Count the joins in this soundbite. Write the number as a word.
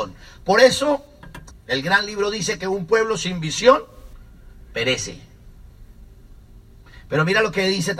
one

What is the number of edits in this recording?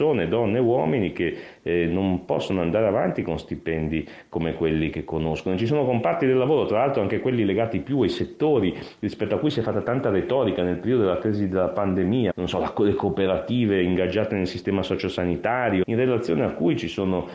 two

